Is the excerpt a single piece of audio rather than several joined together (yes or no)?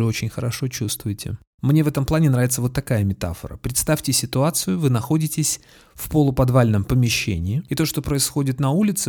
no